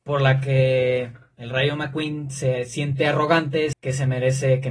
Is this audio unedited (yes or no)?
no